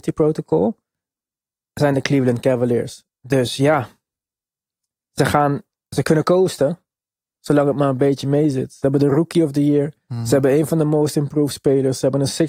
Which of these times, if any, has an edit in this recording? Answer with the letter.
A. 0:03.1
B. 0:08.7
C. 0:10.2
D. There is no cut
A